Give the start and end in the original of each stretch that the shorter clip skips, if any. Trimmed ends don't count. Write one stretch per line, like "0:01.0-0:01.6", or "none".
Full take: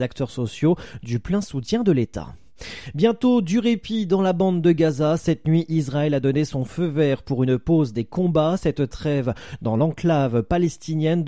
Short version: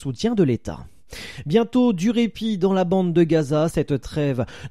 0:05.2-0:08.6